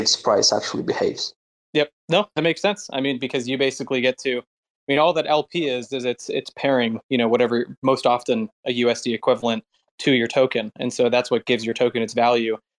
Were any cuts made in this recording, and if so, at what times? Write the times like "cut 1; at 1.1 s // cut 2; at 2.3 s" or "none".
none